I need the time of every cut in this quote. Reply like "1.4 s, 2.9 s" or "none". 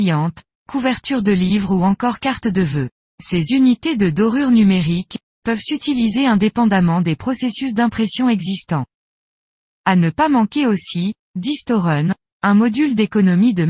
3.1 s, 5.3 s, 9.7 s